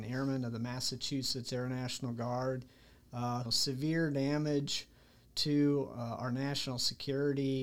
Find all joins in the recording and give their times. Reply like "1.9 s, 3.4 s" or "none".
3.4 s